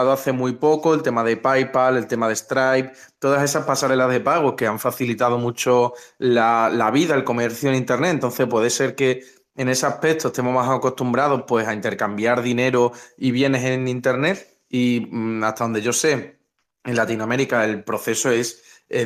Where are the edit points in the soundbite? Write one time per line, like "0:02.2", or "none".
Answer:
none

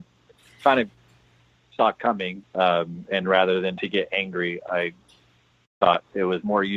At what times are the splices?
0:02.4

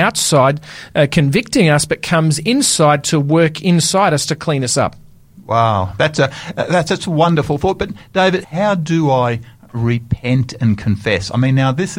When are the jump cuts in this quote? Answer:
0:08.4

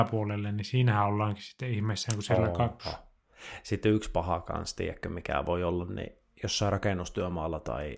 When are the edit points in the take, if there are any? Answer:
0:02.8

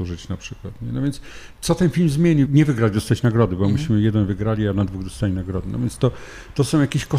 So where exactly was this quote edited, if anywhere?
0:02.5

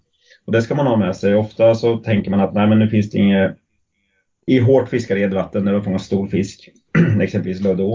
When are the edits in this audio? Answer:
0:04.5

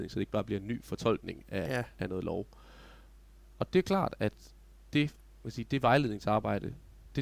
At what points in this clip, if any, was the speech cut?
none

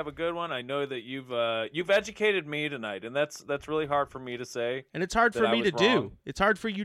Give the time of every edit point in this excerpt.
none

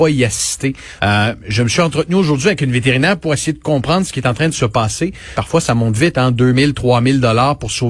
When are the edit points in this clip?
0:01.0
0:05.3

